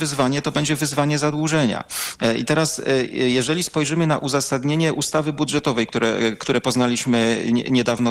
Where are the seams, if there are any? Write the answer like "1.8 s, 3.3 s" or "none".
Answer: none